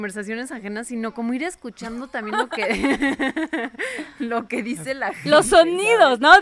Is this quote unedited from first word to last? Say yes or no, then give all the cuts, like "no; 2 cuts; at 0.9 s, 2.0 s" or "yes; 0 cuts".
yes; 0 cuts